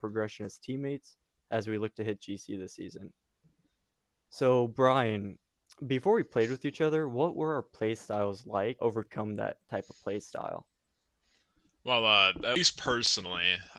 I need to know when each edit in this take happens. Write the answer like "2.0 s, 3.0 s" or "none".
8.8 s